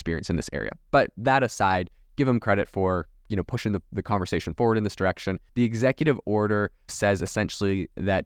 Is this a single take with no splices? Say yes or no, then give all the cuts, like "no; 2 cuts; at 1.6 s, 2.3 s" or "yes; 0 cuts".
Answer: no; 2 cuts; at 5.5 s, 6.9 s